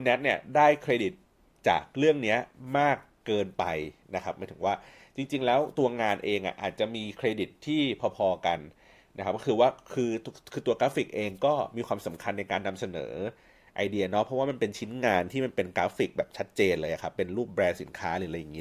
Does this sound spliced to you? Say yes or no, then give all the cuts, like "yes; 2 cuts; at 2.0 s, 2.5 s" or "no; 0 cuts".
no; 0 cuts